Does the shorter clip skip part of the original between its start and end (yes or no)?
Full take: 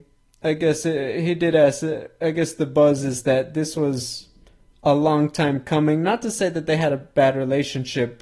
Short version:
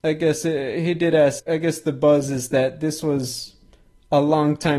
yes